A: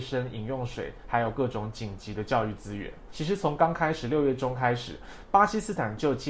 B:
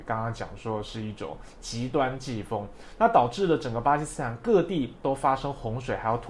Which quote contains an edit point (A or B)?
A